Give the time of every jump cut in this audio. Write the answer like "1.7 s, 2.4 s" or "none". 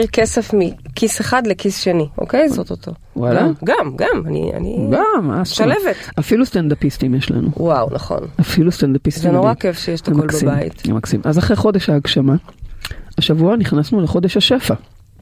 2.5 s